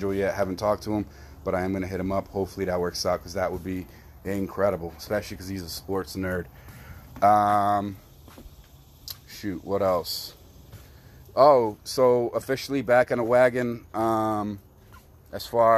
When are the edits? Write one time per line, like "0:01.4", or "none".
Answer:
none